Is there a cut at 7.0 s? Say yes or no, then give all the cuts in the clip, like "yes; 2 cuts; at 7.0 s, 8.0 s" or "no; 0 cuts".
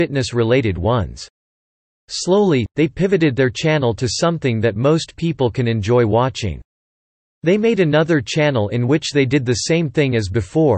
no; 0 cuts